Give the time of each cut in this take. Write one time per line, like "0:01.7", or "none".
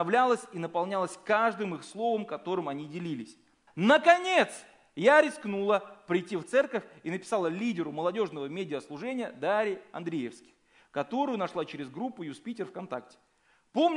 0:03.7